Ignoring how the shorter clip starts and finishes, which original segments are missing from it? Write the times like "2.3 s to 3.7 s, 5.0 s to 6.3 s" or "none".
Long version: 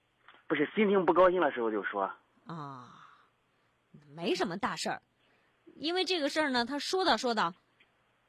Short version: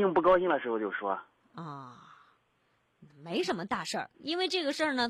5.1 s to 5.7 s